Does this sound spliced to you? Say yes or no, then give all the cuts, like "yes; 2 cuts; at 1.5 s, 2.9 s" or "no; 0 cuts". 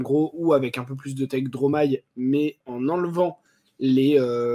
yes; 1 cut; at 2.6 s